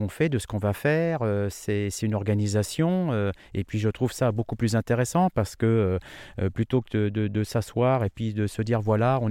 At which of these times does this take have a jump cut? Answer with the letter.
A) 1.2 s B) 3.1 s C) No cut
C